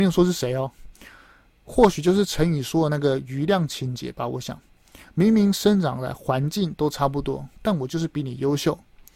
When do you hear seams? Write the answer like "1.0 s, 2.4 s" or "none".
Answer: none